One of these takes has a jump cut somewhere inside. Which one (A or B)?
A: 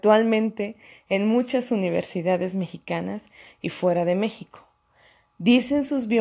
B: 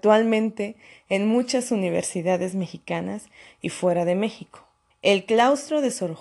B